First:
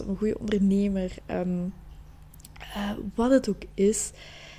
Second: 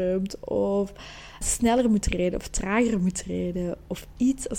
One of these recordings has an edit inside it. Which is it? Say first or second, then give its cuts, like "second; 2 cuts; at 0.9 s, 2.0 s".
second; 1 cut; at 1.4 s